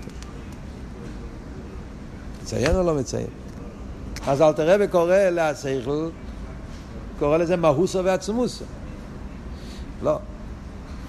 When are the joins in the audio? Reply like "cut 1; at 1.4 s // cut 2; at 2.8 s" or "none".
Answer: cut 1; at 4.2 s // cut 2; at 7.2 s // cut 3; at 10.0 s